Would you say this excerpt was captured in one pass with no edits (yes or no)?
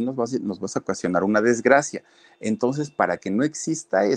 yes